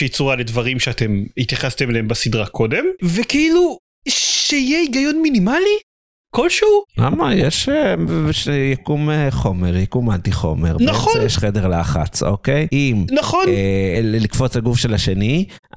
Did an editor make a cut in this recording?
yes; 1 cut; at 13.9 s

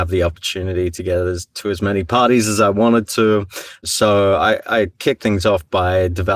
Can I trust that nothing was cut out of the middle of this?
yes; 0 cuts

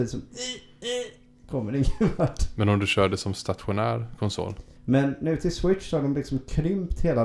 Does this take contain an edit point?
yes; 1 cut; at 4.8 s

